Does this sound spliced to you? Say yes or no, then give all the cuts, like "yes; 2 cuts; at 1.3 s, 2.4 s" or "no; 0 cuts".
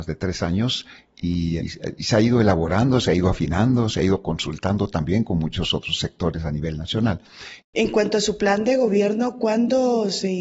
yes; 2 cuts; at 1.6 s, 7.6 s